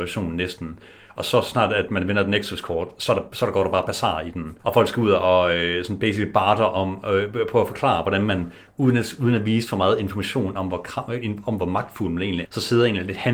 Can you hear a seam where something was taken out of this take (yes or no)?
yes